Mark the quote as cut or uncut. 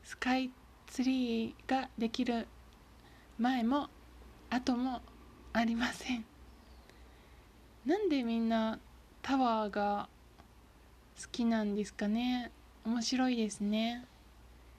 uncut